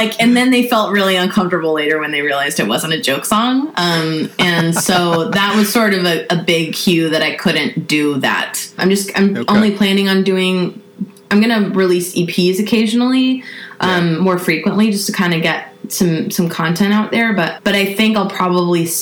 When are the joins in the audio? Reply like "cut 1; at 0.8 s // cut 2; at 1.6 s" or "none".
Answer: cut 1; at 8.8 s // cut 2; at 17.6 s